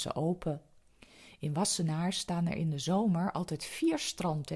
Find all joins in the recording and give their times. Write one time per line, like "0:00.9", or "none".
none